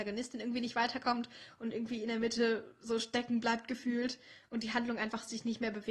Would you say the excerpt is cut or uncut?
uncut